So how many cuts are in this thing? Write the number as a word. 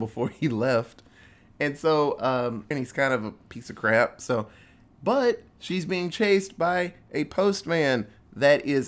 one